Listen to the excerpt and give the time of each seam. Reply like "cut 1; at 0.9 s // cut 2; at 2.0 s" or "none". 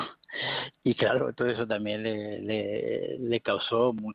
none